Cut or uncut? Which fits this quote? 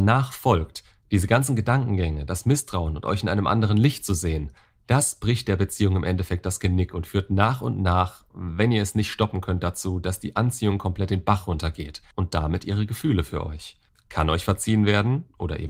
cut